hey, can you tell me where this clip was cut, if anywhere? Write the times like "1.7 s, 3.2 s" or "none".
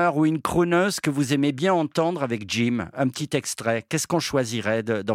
none